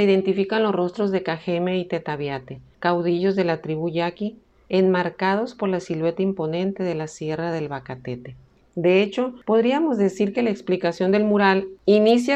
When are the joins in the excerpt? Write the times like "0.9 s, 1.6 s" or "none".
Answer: 8.6 s